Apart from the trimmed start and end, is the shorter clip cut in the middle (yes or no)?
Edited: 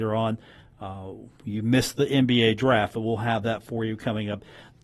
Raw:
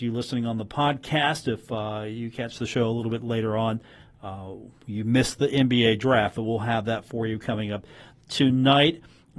no